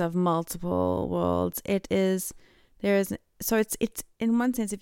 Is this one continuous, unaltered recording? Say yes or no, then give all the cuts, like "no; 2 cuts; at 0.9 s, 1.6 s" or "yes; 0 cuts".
yes; 0 cuts